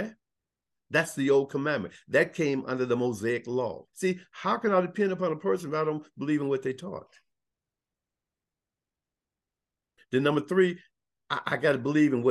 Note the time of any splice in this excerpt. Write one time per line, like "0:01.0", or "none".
0:03.9